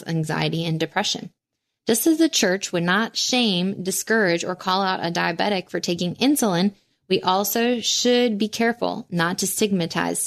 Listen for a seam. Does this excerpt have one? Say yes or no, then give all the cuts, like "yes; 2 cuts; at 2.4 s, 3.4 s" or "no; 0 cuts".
yes; 1 cut; at 1.8 s